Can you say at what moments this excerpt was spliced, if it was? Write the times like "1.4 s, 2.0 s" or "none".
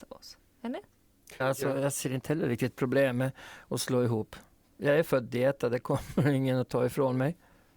1.4 s